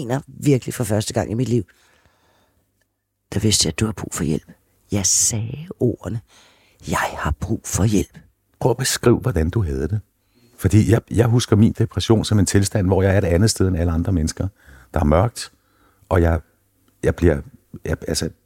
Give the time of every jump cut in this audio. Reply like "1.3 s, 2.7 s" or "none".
none